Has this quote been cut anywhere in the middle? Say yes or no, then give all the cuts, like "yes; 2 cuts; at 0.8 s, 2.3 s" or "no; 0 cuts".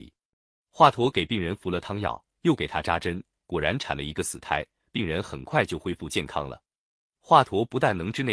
no; 0 cuts